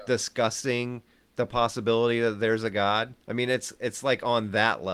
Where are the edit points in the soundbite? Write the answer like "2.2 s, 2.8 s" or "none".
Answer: 3.2 s